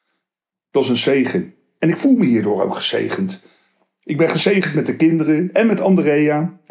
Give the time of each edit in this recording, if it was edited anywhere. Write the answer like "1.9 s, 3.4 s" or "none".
none